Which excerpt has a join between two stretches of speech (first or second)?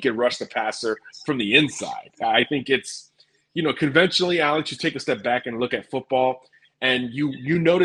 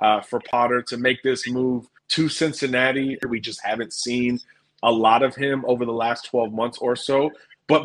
second